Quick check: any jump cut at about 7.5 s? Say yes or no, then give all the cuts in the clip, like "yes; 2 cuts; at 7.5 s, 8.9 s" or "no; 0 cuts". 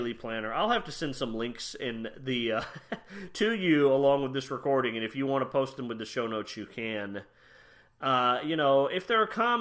no; 0 cuts